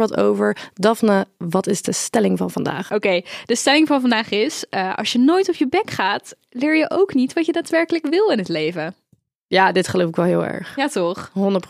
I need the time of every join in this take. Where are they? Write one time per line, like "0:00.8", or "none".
none

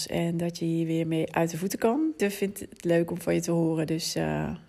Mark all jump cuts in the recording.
0:02.2

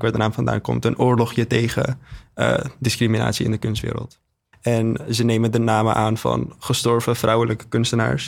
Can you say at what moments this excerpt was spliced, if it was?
0:04.5

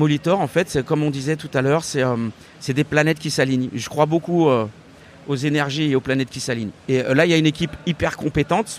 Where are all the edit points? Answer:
none

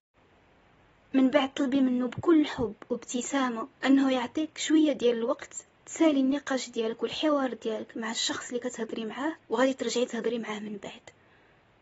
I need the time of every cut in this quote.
0:03.8
0:09.4

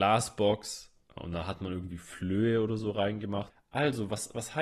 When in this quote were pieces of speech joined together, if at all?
0:03.5

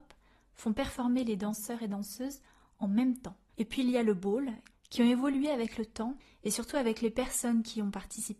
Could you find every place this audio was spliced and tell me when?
0:03.5
0:04.7

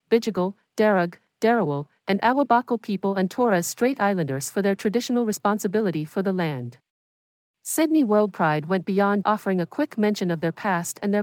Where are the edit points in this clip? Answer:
0:09.2

